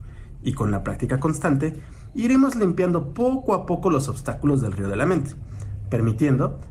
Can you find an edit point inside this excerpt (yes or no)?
no